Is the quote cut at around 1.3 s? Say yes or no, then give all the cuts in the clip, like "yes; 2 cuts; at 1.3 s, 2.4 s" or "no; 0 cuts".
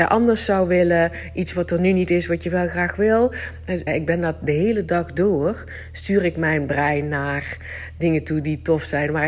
no; 1 cut; at 3.9 s